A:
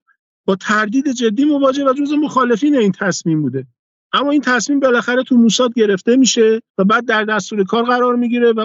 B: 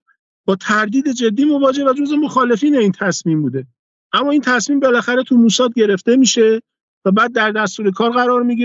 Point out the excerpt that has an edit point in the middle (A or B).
A